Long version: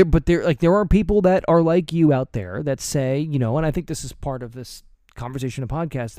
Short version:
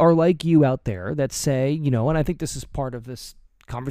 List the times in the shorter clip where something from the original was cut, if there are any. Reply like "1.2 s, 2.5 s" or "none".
none